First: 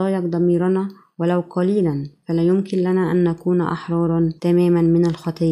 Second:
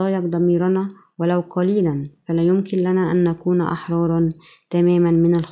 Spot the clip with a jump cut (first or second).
first